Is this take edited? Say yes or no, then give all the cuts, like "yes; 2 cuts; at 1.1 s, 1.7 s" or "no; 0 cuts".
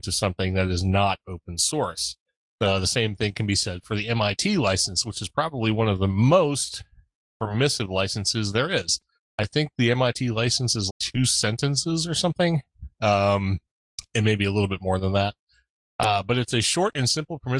yes; 1 cut; at 10.9 s